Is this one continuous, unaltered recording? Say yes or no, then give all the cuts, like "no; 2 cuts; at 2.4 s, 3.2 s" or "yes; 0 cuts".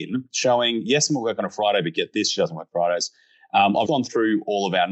no; 1 cut; at 3.8 s